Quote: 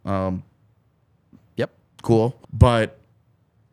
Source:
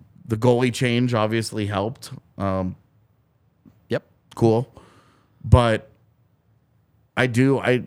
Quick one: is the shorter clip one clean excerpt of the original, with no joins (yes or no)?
no